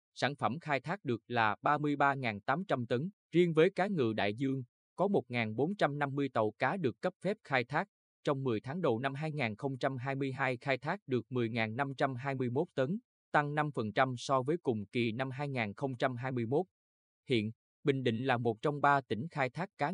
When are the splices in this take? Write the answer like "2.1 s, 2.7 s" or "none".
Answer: 3.2 s